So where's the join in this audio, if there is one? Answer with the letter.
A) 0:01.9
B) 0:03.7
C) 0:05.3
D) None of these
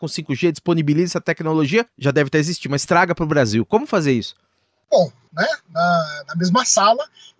C